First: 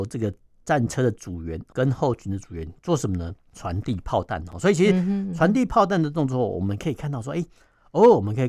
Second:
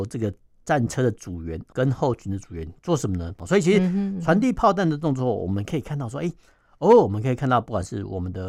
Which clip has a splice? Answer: second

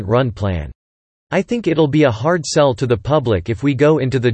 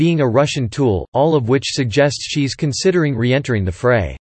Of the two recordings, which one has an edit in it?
first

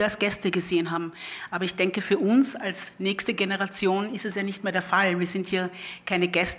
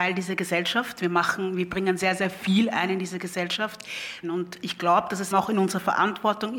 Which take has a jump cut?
second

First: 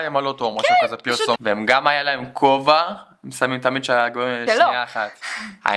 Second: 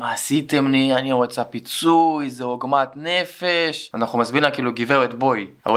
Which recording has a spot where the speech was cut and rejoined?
first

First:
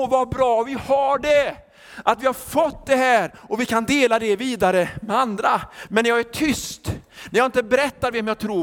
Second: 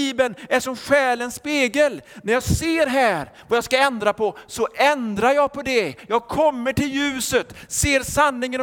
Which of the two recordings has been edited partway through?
first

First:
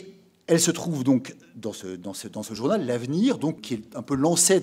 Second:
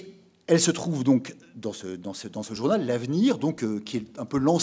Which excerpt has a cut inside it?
first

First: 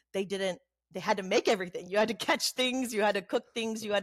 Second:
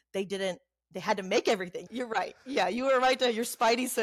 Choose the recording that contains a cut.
second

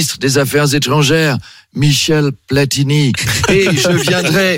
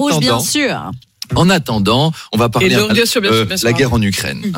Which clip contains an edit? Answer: second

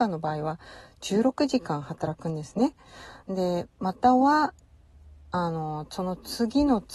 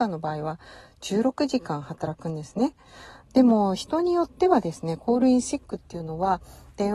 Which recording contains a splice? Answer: second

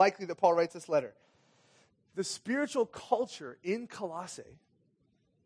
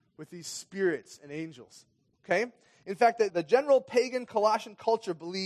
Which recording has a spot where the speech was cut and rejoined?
second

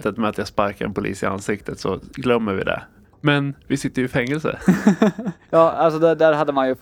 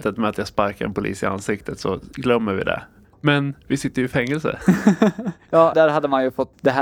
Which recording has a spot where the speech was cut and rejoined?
second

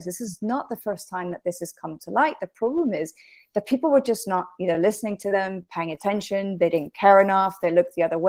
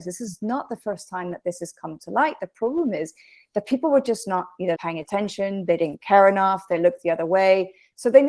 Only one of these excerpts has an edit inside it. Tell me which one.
second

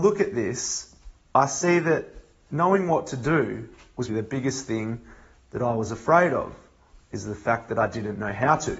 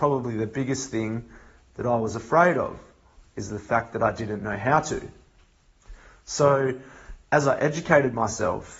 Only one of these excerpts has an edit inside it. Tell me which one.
first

